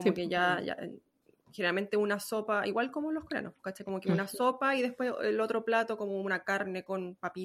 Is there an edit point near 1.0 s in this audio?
no; 0 cuts

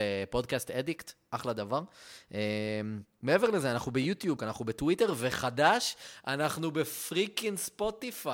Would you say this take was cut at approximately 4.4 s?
yes; 1 cut; at 4.4 s

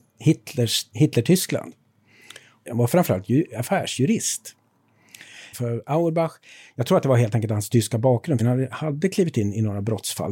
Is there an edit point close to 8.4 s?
yes; 2 cuts; at 5.5 s, 8.4 s

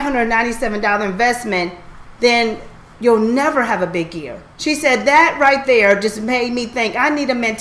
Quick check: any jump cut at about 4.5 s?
yes; 1 cut; at 4.5 s

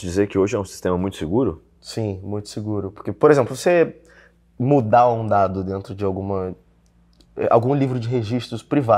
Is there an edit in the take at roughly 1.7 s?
no; 0 cuts

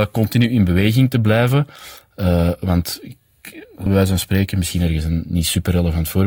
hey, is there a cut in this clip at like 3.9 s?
yes; 1 cut; at 3.9 s

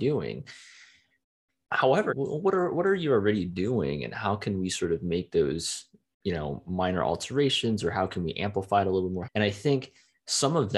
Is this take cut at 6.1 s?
no; 2 cuts; at 2.1 s, 9.2 s

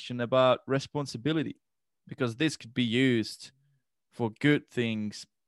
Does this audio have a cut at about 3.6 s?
no; 0 cuts

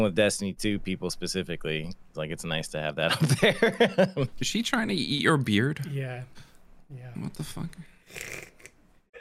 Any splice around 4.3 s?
yes; 1 cut; at 4.3 s

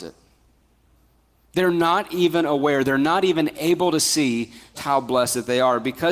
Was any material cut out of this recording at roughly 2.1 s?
no; 1 cut; at 4.7 s

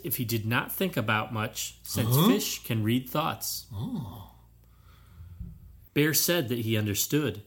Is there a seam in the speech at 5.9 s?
yes; 1 cut; at 5.9 s

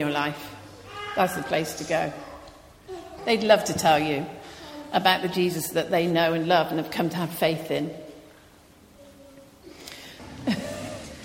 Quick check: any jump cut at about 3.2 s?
yes; 2 cuts; at 3.2 s, 10.2 s

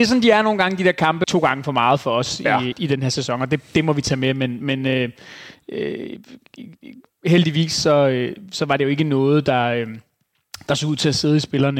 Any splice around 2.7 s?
yes; 2 cuts; at 1.2 s, 2.7 s

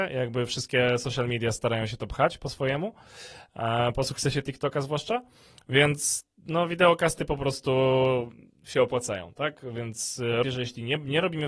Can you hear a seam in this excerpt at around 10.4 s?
yes; 1 cut; at 10.4 s

